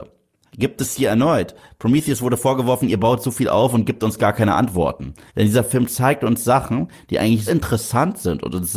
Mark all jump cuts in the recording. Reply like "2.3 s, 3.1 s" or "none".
5.3 s, 7.5 s